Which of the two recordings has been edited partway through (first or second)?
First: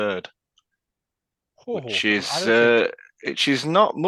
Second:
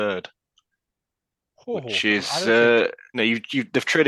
second